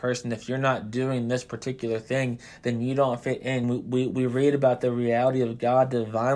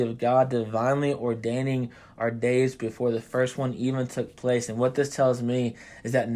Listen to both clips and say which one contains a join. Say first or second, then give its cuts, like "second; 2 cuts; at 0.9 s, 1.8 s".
first; 1 cut; at 3.6 s